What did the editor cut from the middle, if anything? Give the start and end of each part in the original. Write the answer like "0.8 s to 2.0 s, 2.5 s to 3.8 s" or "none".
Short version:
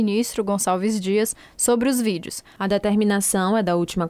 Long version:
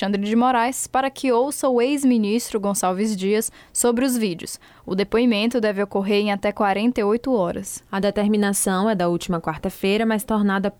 4.7 s to 7.9 s